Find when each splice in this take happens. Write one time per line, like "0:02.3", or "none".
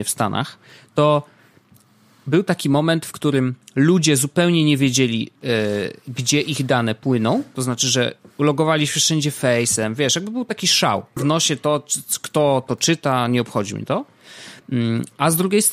0:11.2